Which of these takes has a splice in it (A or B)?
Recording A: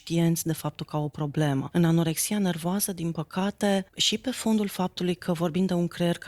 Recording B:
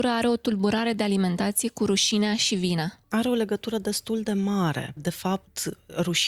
B